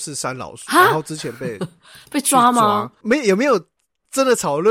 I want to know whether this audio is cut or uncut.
cut